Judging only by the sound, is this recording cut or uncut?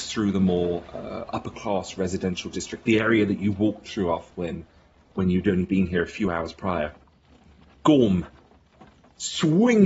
uncut